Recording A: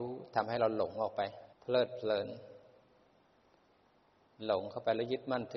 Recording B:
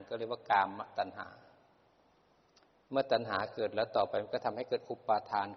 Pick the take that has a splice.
A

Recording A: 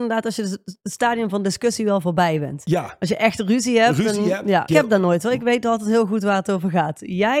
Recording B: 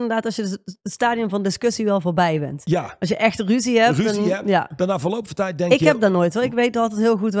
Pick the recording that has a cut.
A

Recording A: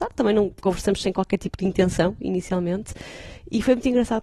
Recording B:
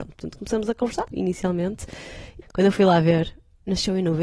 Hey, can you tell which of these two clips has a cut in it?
B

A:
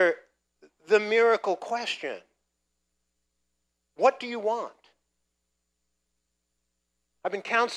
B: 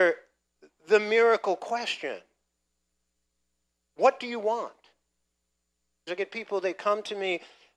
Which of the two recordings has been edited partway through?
B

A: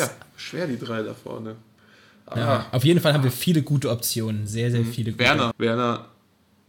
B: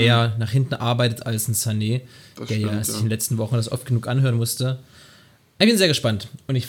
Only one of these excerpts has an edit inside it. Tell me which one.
A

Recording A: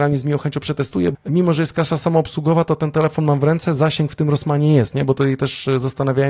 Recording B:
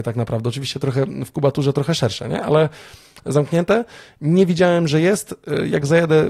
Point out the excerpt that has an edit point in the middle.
A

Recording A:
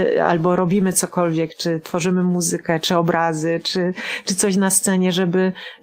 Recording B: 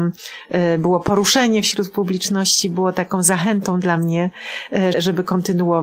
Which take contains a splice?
B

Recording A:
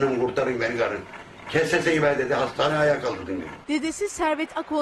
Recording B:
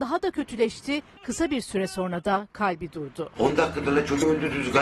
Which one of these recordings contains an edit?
B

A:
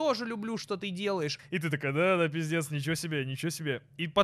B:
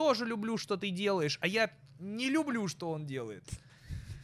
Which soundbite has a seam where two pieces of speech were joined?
A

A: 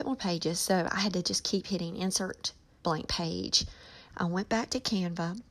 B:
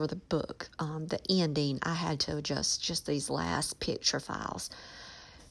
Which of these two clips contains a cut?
A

